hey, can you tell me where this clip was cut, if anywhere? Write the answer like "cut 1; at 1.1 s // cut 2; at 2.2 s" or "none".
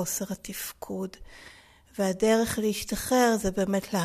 none